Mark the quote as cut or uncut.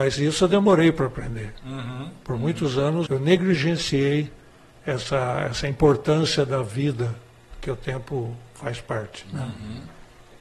cut